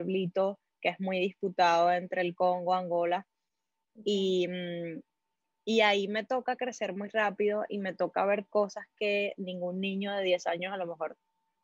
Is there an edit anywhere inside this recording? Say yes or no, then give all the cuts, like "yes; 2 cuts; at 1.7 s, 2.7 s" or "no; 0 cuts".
no; 0 cuts